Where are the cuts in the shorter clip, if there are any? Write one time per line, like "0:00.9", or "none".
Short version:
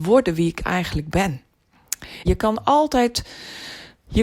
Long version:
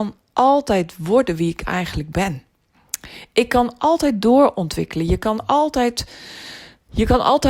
0:02.2